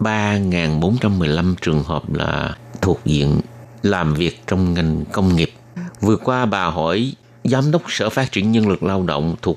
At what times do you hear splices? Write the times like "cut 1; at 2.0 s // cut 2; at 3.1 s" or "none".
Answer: cut 1; at 5.9 s